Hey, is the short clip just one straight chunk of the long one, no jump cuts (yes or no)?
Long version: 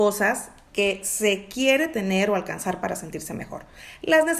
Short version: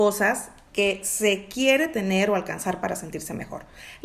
yes